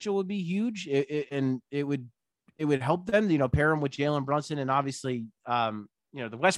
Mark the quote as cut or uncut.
uncut